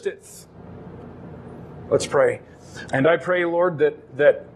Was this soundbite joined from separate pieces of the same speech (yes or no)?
yes